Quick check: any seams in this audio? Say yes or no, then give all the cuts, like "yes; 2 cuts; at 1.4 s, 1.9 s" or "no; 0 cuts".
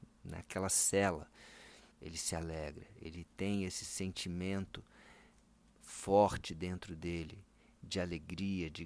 yes; 1 cut; at 1.9 s